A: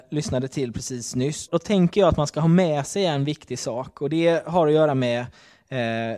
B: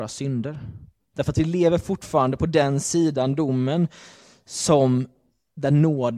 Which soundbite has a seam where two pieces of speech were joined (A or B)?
A